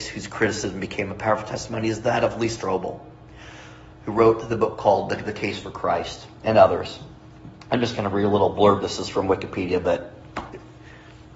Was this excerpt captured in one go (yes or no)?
yes